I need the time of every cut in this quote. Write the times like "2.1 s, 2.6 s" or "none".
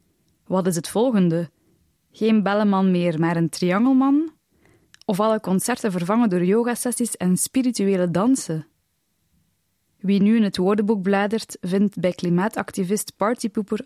1.9 s, 9.9 s